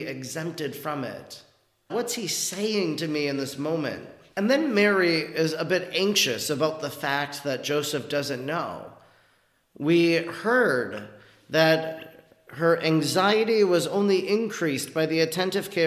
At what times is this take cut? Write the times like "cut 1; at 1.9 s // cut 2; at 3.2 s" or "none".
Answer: cut 1; at 1.9 s